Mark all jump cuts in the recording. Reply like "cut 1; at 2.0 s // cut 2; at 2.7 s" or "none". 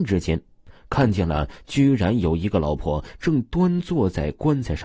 cut 1; at 2.8 s